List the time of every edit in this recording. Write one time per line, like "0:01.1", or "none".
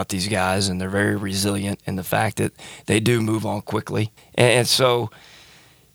0:04.2